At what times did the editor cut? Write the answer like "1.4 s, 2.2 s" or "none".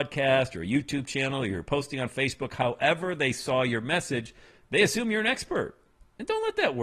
none

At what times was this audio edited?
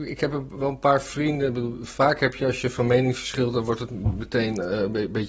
none

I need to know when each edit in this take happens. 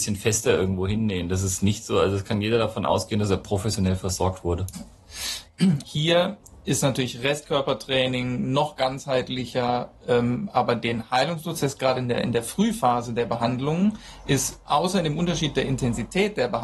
5.8 s

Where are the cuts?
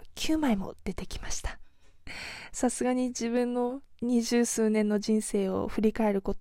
none

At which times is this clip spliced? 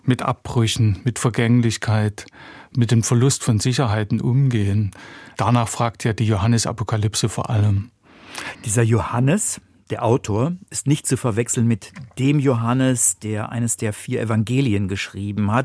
8.5 s

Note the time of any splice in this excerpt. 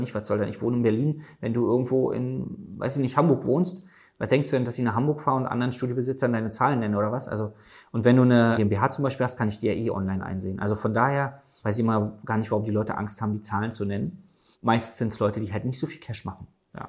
none

